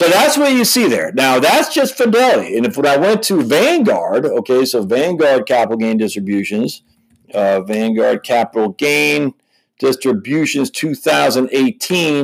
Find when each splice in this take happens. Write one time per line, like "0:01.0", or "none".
none